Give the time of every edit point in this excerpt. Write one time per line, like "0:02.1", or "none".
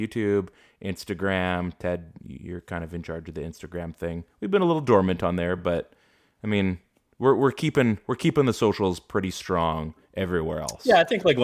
none